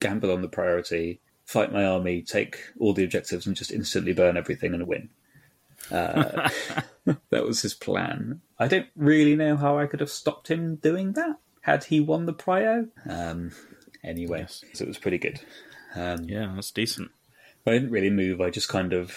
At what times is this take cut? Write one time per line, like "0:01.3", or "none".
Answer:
0:08.5
0:13.0
0:14.7